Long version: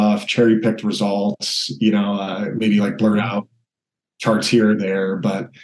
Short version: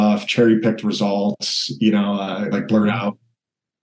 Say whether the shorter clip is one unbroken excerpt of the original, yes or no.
no